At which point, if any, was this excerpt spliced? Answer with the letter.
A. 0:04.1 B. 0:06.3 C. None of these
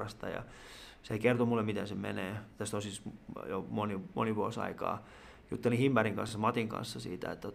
C